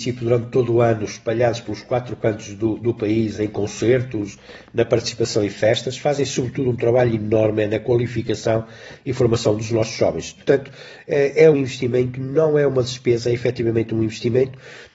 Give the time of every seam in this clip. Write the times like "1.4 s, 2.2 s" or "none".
2.8 s, 10.4 s, 11.5 s